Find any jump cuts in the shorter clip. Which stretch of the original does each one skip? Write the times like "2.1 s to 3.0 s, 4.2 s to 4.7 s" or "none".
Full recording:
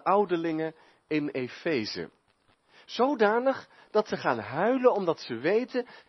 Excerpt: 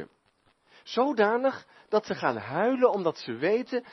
none

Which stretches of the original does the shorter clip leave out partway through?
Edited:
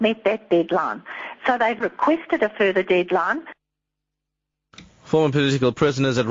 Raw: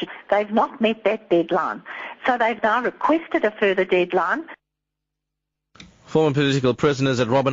2.6 s to 2.8 s

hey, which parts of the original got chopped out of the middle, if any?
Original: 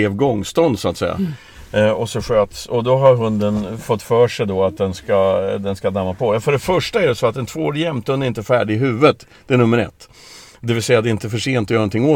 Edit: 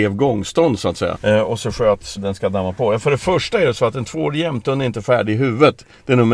1.2 s to 1.7 s, 2.7 s to 5.6 s

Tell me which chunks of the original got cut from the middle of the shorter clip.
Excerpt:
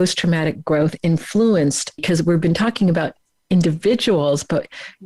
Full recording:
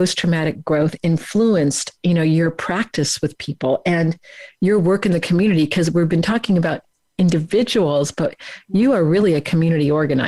2.0 s to 5.7 s

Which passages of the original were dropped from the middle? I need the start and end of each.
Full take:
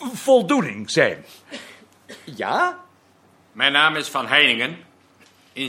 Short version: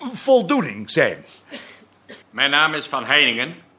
2.2 s to 3.4 s

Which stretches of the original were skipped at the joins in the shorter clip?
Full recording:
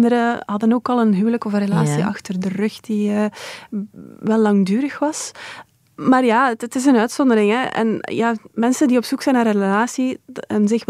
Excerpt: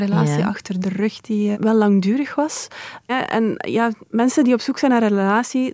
3.1 s to 4.2 s, 5.7 s to 7.5 s

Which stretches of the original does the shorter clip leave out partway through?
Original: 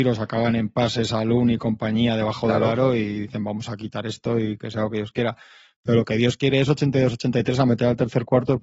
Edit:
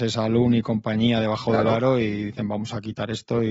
none

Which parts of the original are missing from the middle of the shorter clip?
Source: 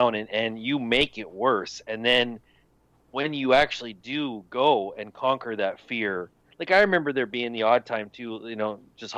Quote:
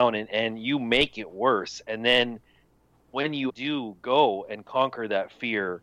3.5 s to 3.9 s

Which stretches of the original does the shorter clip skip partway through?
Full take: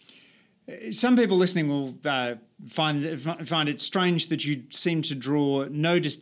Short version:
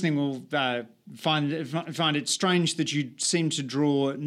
none

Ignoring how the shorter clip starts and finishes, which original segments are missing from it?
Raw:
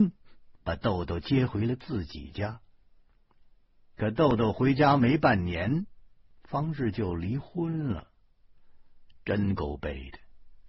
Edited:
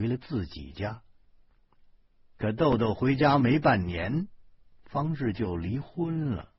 none

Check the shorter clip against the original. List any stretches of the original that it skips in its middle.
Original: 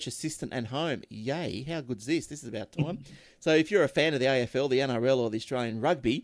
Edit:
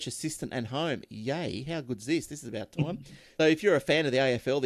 3.4 s to 3.5 s

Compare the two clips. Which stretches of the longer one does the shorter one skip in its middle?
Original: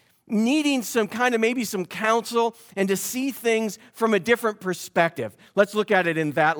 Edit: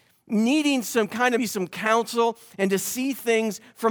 1.4 s to 1.6 s

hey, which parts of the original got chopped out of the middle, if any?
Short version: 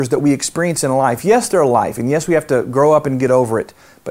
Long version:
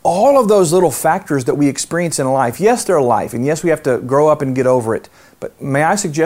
none

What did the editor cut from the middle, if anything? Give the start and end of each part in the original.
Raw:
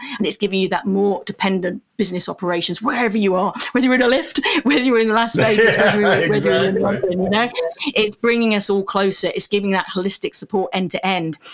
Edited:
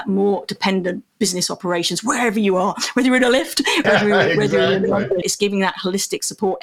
4.6 s to 5.8 s, 7.1 s to 9.3 s

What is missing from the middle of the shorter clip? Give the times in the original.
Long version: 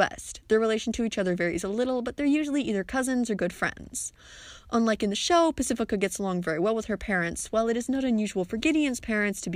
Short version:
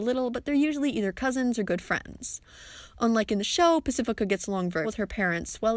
6.6 s to 6.7 s

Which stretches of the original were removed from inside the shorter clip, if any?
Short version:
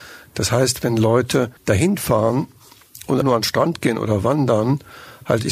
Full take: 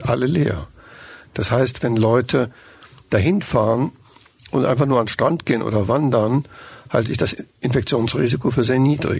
2.6 s to 3.0 s, 4.7 s to 4.9 s

